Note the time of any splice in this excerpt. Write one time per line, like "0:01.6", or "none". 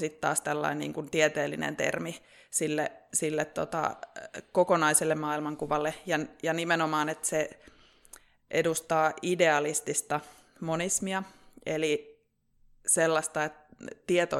none